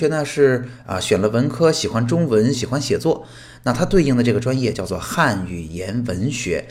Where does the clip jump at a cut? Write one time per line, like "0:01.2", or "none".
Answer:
0:02.5